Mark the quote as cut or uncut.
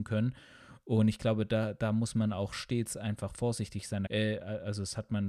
cut